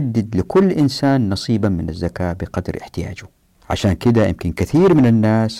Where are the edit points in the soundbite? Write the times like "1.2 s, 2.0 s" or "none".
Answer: none